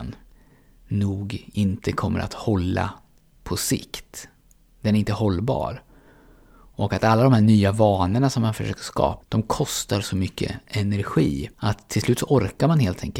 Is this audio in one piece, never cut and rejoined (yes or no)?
no